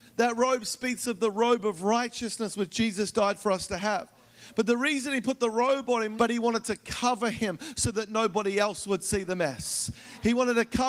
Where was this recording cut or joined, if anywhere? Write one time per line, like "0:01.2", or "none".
0:06.2